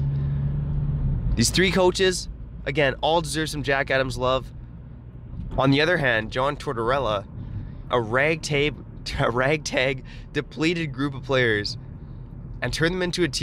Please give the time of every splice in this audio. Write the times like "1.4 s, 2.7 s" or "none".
5.5 s, 7.9 s